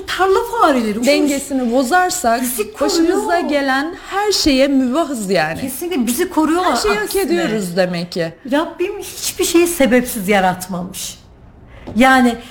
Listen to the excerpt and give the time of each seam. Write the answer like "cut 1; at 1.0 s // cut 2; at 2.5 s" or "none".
cut 1; at 1.0 s